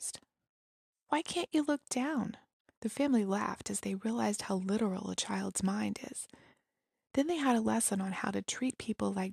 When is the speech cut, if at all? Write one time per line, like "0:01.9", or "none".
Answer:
0:02.7